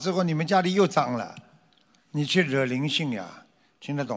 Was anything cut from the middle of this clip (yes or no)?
no